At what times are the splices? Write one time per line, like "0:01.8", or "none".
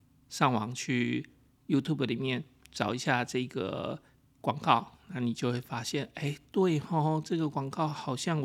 none